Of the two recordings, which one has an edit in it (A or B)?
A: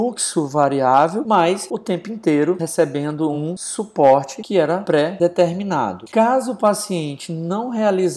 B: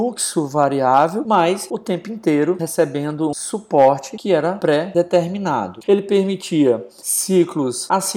B